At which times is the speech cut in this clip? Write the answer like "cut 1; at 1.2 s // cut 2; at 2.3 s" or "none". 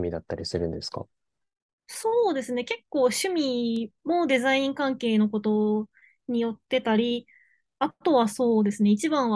none

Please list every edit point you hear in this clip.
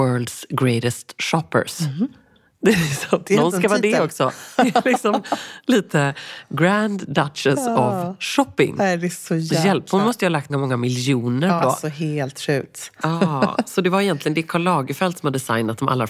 cut 1; at 10.5 s // cut 2; at 11.6 s // cut 3; at 13.0 s

